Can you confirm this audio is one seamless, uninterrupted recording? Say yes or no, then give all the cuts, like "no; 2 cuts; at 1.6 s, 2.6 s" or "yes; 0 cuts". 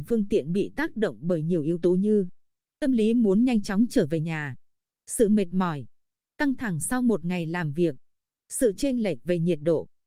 yes; 0 cuts